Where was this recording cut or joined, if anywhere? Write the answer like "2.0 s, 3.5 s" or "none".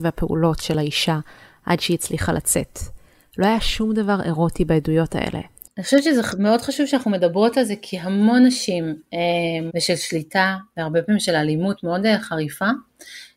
5.7 s, 9.7 s